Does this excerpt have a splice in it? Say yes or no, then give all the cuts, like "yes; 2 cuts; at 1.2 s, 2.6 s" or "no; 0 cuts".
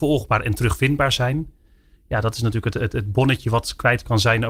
no; 0 cuts